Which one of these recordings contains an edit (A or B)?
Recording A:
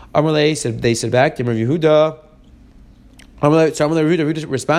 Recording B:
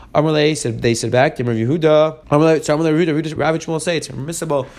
B